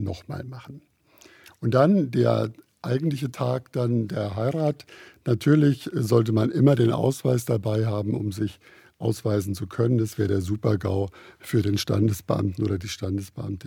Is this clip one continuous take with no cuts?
yes; 0 cuts

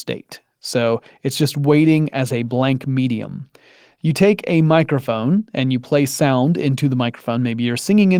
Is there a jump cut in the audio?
no; 0 cuts

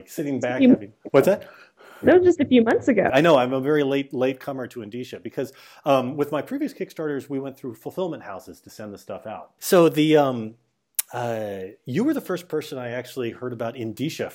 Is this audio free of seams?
no; 2 cuts; at 3.1 s, 9.6 s

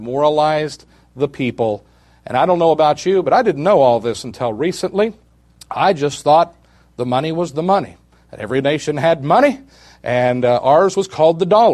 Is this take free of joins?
yes; 0 cuts

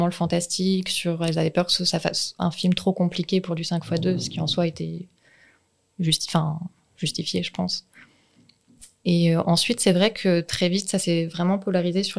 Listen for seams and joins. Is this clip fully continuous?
yes; 0 cuts

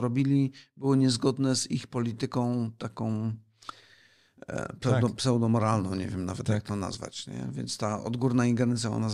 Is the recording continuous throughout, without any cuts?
yes; 0 cuts

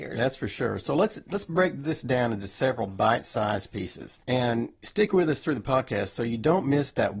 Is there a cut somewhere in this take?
yes; 1 cut; at 4.2 s

